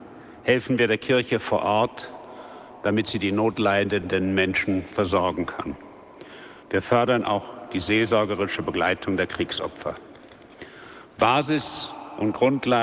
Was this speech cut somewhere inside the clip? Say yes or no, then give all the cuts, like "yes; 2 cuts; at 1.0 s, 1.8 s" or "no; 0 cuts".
no; 0 cuts